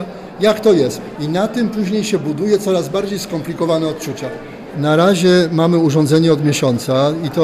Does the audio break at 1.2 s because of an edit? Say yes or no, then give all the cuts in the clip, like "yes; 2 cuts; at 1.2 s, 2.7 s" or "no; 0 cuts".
yes; 1 cut; at 1.2 s